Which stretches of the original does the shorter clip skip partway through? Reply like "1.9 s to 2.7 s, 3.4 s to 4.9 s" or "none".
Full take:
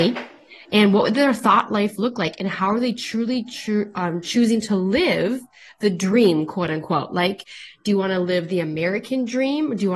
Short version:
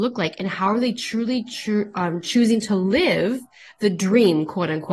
none